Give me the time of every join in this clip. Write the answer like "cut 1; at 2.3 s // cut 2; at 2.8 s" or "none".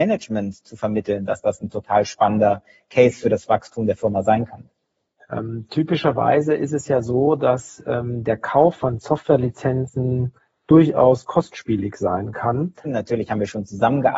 cut 1; at 5.2 s // cut 2; at 12.8 s